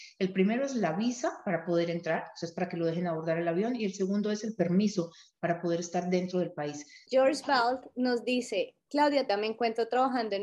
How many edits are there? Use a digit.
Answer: 2